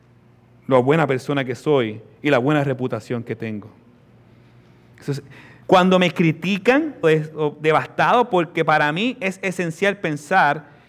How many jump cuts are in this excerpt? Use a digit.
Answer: 2